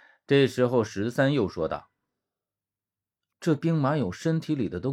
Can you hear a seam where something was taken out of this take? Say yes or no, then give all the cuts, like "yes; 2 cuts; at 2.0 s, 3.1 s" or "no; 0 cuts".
no; 0 cuts